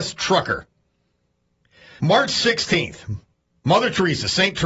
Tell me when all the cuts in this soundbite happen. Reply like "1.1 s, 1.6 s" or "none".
2.0 s

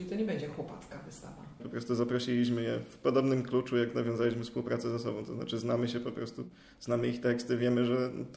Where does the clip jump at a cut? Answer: 1.6 s

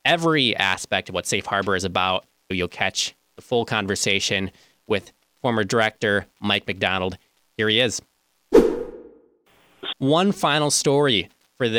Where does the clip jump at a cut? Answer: 2.5 s, 9.9 s

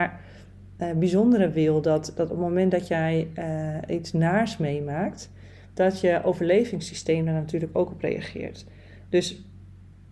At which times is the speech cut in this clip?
none

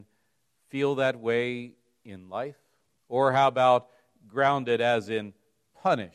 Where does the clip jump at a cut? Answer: 3.0 s

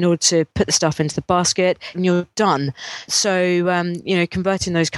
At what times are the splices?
1.9 s

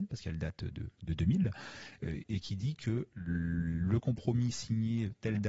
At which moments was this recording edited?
none

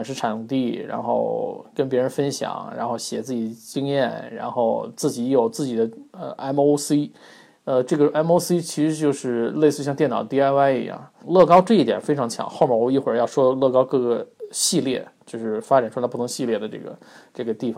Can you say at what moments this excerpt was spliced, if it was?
11.2 s

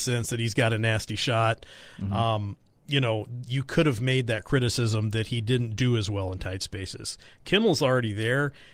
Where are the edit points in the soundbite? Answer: 1.9 s

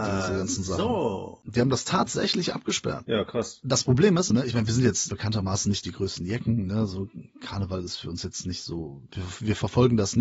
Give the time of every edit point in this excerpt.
4.3 s

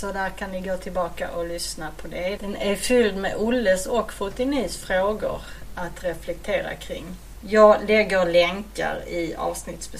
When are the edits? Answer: 2.4 s, 7.4 s

